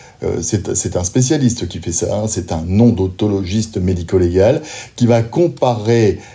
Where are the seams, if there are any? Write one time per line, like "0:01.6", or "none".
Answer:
none